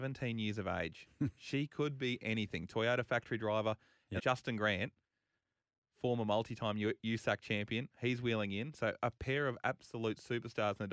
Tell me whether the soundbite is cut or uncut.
cut